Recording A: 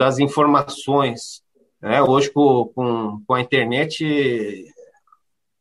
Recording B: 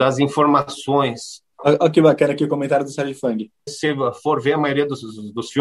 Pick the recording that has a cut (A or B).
B